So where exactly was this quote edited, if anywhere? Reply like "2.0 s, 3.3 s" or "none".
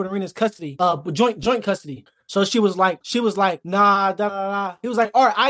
3.0 s, 4.3 s